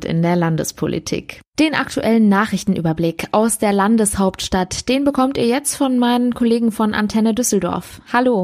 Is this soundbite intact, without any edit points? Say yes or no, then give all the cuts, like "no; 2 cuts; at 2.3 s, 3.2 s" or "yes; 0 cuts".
yes; 0 cuts